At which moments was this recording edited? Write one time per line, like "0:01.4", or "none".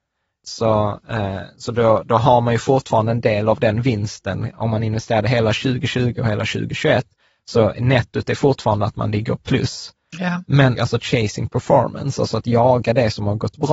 0:10.7

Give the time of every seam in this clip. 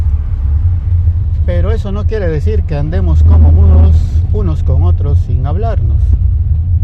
none

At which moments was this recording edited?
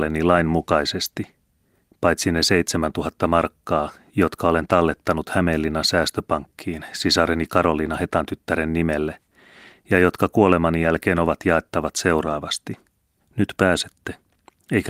0:13.2

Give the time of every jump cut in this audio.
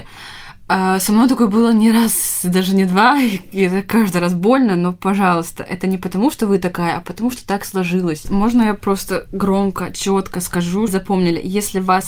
0:08.2
0:10.9

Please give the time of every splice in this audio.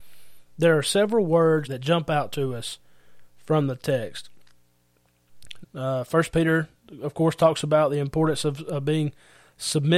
0:01.6
0:05.6

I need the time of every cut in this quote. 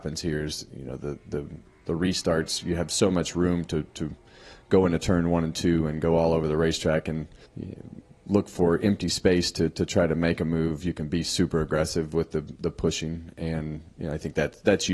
0:07.5

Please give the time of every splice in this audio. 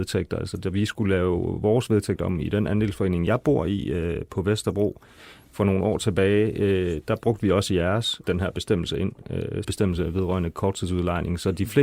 0:08.2
0:09.6

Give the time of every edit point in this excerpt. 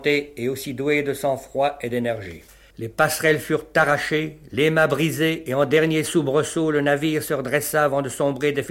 0:02.7

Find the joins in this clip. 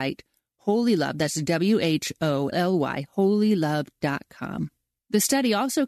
0:02.5

